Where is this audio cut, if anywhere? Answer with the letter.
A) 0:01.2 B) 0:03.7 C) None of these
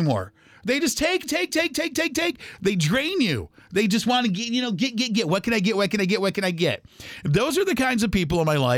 A